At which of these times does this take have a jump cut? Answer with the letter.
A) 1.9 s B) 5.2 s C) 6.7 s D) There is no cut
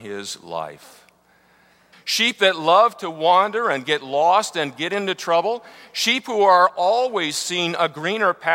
A